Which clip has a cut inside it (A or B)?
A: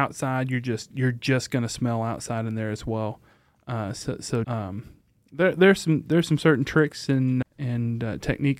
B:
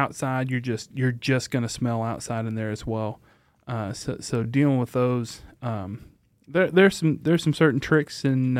A